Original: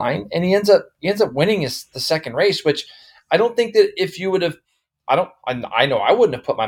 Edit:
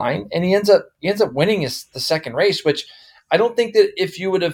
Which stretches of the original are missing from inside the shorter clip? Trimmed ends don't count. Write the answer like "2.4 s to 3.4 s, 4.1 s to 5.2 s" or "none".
none